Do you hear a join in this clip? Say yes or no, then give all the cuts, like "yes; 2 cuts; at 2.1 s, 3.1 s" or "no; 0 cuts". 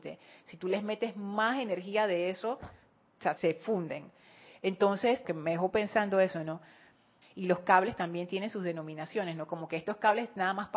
yes; 3 cuts; at 3.4 s, 5.2 s, 7.2 s